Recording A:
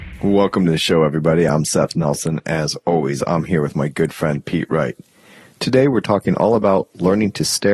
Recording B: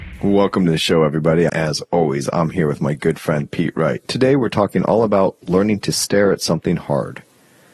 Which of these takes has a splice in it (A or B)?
B